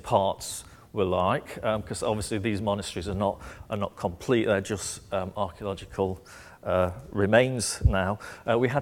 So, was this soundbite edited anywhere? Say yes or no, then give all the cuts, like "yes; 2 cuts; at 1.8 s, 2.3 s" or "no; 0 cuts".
no; 0 cuts